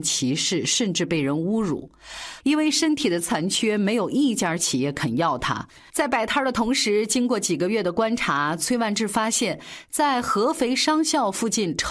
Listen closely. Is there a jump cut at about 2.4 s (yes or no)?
yes